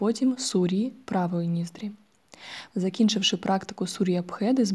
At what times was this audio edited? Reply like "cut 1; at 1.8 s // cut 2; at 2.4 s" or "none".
cut 1; at 2.7 s